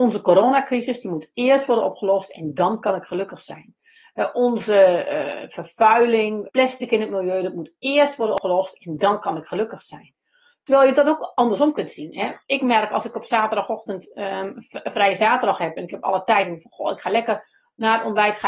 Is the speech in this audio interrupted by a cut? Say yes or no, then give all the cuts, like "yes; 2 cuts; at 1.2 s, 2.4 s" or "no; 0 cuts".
yes; 1 cut; at 6.5 s